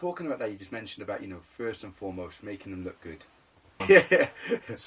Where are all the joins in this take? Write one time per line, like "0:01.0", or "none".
0:03.8